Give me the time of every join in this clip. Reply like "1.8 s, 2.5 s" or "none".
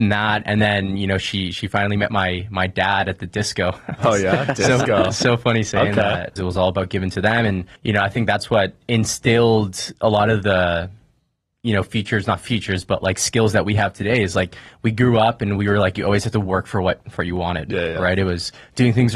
6.4 s, 7.8 s